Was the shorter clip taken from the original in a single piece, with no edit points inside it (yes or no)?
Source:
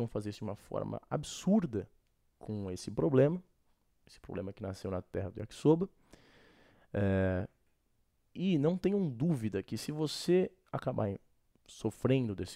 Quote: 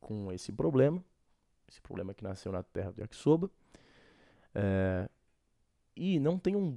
yes